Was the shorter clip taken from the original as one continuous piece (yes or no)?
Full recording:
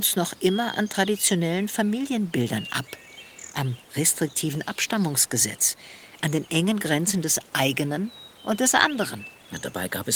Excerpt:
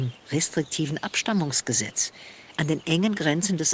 yes